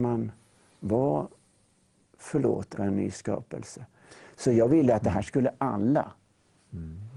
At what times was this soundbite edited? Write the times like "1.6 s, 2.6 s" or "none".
2.8 s